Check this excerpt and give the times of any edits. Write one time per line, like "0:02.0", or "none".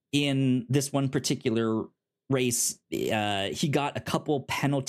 none